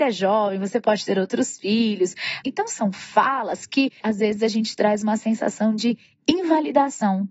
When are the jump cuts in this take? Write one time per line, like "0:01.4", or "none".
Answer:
0:02.4
0:04.0